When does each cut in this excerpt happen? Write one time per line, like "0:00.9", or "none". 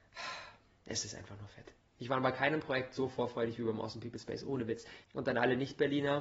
0:05.0